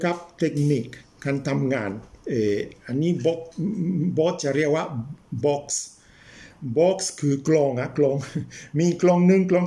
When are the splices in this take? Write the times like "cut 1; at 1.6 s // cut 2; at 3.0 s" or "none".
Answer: cut 1; at 5.4 s